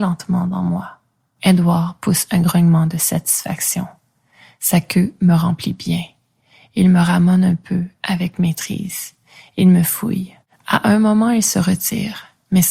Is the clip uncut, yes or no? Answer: yes